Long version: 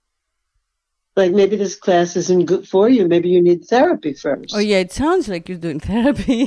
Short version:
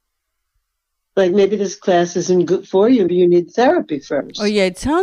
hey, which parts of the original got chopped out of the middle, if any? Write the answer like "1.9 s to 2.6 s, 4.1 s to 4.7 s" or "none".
3.1 s to 3.2 s